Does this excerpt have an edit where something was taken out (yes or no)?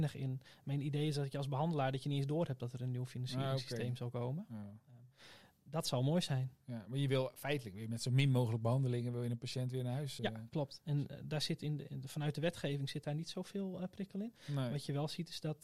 no